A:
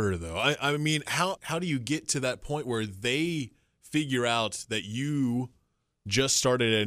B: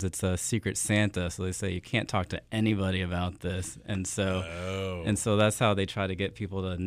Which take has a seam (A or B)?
A